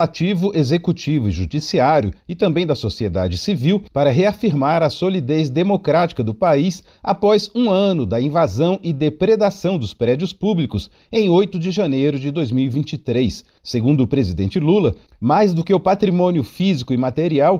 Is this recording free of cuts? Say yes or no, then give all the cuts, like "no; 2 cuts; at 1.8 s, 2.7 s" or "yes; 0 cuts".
yes; 0 cuts